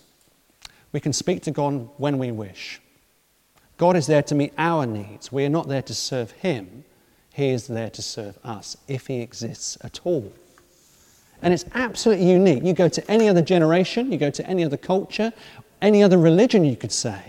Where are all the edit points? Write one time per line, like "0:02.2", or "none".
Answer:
none